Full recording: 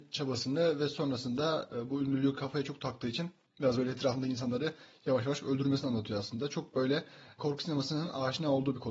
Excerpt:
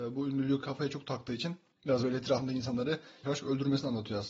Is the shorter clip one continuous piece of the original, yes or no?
no